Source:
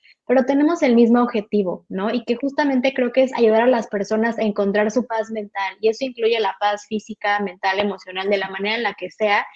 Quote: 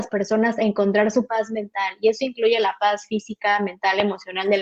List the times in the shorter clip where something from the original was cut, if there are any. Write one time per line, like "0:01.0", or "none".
none